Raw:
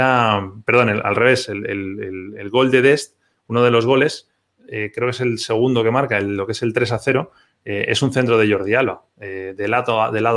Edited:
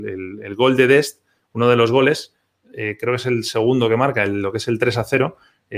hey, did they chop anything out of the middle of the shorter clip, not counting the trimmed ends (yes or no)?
no